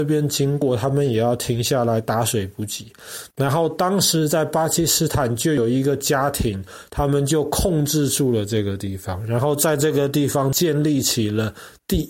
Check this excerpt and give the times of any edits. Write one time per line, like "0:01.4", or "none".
none